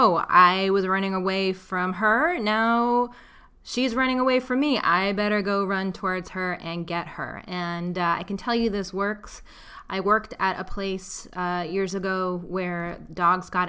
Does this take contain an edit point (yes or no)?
no